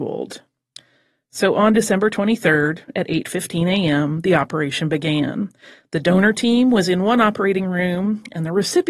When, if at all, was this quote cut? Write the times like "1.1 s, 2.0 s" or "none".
none